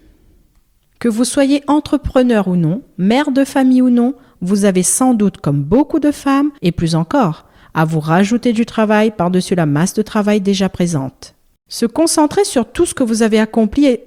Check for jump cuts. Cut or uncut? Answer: cut